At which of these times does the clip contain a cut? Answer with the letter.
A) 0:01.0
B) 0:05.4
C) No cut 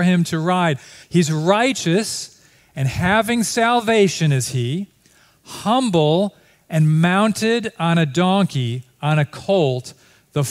A